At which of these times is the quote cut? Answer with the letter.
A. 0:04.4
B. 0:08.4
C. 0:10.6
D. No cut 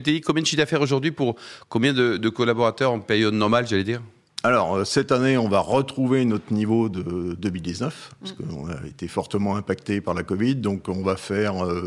D